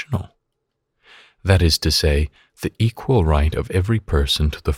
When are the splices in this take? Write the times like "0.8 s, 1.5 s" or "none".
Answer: none

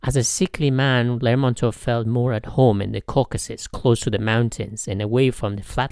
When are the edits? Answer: none

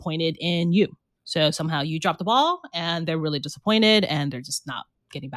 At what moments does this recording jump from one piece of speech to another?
none

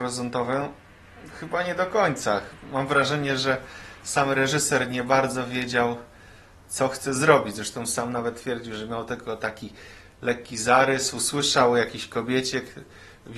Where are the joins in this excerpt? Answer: none

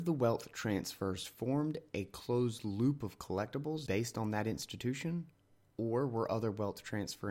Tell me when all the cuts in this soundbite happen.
3.9 s

